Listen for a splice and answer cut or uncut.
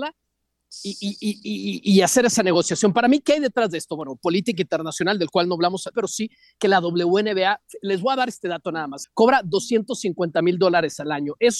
cut